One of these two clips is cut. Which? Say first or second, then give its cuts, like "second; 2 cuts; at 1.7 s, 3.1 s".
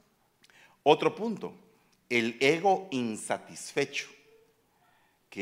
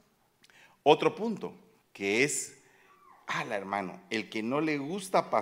second; 1 cut; at 1.8 s